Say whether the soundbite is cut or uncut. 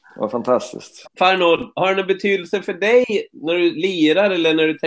cut